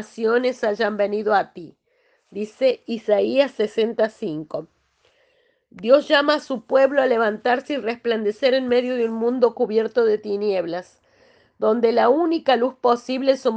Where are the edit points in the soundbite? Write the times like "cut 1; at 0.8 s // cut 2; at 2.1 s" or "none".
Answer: none

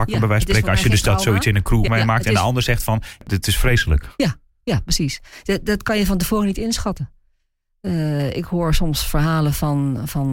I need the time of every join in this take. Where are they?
cut 1; at 1.9 s

